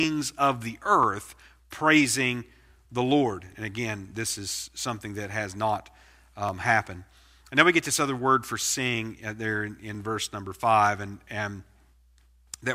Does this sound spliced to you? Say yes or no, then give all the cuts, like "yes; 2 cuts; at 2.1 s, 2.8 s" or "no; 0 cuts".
no; 0 cuts